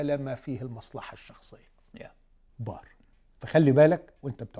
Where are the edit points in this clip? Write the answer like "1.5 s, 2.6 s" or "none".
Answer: 2.5 s